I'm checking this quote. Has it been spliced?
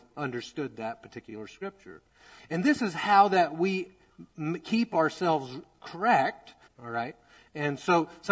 yes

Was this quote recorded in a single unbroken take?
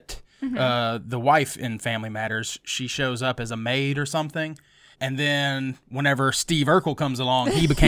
no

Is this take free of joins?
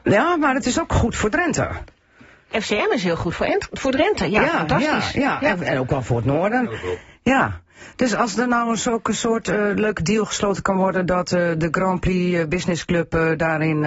no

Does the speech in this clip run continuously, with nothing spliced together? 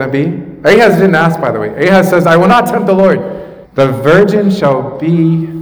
no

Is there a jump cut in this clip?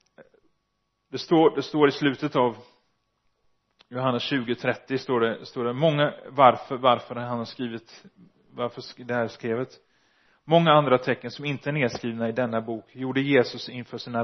no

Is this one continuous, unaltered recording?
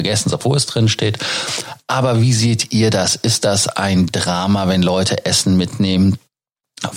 yes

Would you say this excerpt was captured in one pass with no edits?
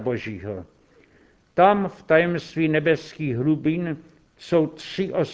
yes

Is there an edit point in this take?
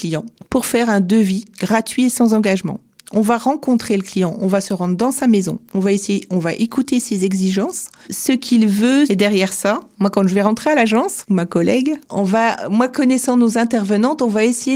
no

